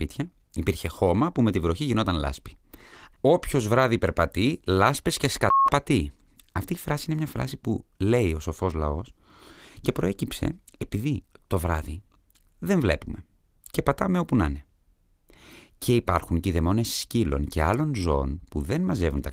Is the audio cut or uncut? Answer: cut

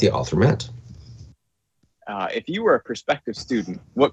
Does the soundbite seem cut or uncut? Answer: cut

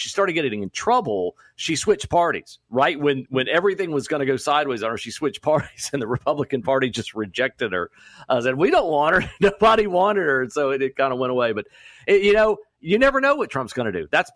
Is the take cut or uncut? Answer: uncut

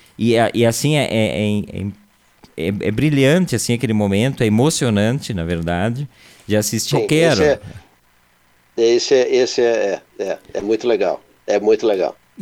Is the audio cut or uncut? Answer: cut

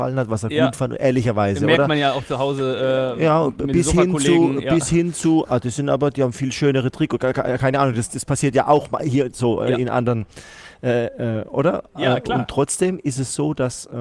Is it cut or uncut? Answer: uncut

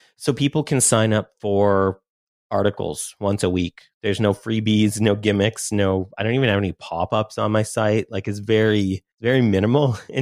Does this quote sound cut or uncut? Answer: uncut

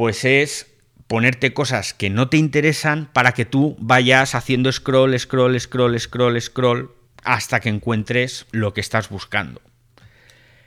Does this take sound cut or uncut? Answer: uncut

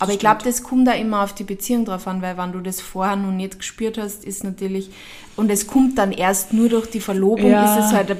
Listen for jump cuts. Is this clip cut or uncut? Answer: uncut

